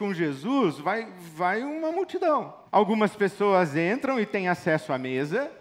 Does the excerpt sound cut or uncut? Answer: cut